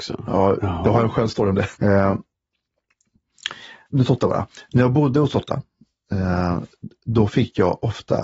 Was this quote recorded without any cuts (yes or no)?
no